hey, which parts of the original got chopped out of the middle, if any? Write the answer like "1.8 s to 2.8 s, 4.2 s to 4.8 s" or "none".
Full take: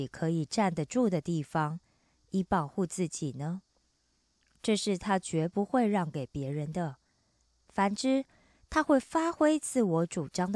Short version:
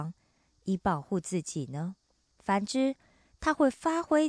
4.0 s to 7.6 s